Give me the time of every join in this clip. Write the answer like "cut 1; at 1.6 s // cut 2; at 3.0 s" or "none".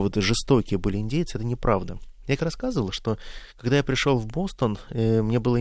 cut 1; at 2.4 s